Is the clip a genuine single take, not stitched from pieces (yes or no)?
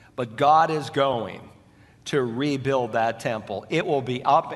yes